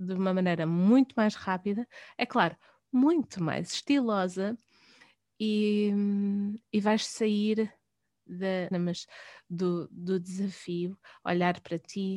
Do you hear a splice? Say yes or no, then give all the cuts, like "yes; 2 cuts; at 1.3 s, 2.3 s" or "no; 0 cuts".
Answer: yes; 1 cut; at 8.7 s